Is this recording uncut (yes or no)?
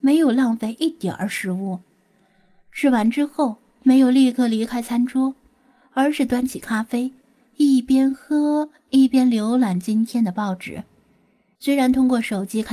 no